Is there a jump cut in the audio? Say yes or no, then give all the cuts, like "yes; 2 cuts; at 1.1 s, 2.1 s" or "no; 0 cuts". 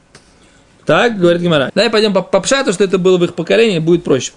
yes; 1 cut; at 1.7 s